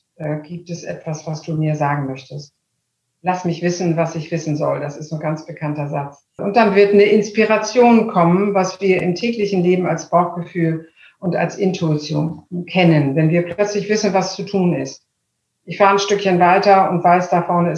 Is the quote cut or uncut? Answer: cut